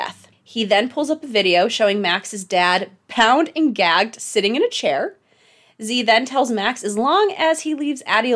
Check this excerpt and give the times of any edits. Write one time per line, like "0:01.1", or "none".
none